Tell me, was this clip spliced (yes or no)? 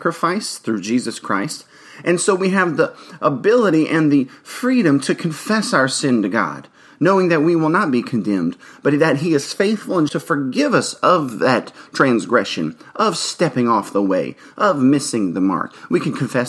yes